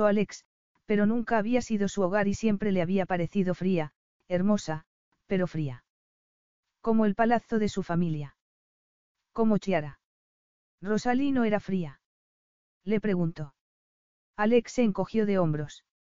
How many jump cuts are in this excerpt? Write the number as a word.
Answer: one